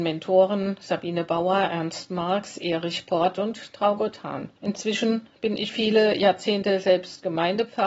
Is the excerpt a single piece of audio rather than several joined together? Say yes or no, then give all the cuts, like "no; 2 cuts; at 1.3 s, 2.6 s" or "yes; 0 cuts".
no; 2 cuts; at 4.6 s, 5.7 s